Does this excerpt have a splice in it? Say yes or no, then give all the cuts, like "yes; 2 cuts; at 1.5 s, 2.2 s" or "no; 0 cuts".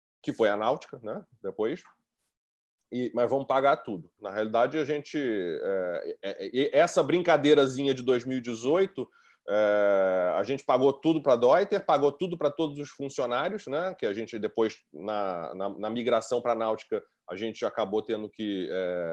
yes; 1 cut; at 4.2 s